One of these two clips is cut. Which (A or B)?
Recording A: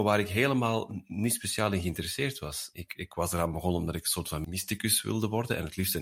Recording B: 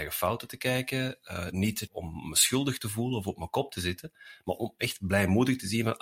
A